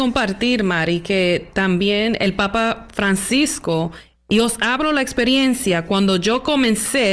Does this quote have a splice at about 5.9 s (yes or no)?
no